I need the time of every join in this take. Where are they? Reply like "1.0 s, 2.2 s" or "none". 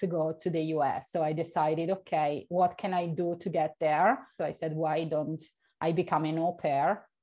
1.1 s, 4.4 s